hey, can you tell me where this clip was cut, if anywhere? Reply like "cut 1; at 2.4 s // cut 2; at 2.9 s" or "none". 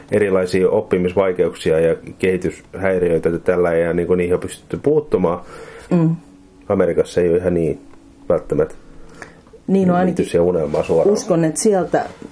cut 1; at 5.9 s